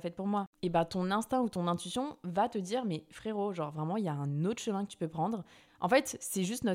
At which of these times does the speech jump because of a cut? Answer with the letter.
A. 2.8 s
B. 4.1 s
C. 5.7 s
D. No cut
C